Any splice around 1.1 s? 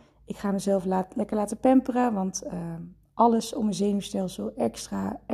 no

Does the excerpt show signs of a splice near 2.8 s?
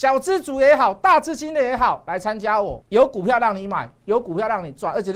yes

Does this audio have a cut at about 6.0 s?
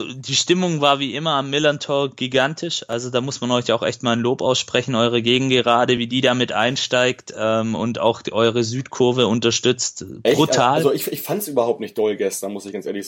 no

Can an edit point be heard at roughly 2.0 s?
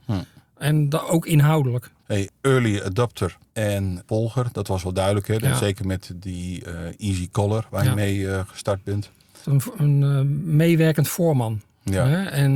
yes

